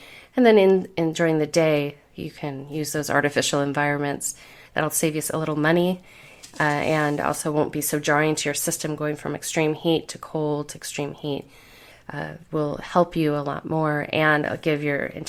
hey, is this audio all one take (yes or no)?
no